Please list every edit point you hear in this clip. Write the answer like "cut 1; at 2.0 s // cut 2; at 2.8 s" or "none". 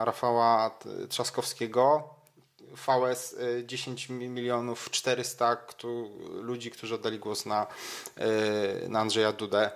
none